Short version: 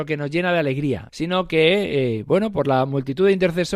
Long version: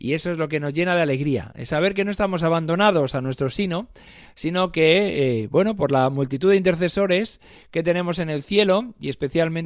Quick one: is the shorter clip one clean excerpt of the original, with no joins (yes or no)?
no